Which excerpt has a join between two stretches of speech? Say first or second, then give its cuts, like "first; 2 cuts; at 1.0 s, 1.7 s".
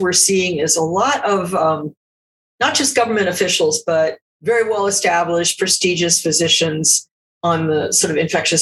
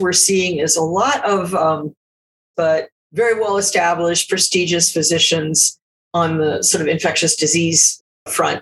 second; 1 cut; at 2.5 s